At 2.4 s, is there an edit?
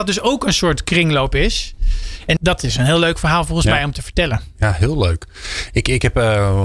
yes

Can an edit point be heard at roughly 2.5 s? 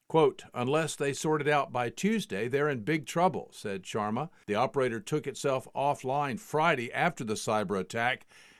no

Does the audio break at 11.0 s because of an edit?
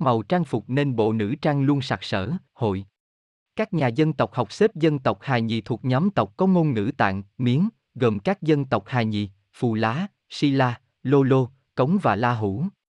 no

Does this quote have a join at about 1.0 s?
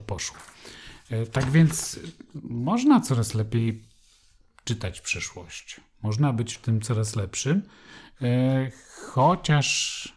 no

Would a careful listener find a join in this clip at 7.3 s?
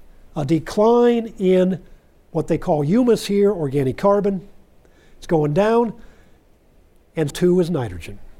yes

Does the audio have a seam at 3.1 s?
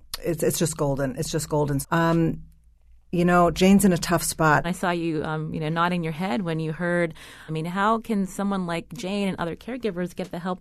no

